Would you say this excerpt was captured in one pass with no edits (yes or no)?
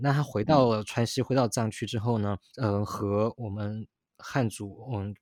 no